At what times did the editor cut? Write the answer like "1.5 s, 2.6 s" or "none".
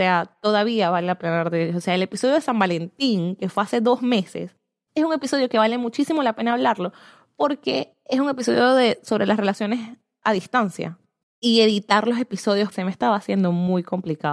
11.2 s, 12.7 s